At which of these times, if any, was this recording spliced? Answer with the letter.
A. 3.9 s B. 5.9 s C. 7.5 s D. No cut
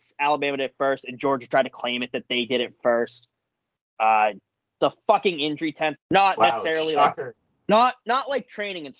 B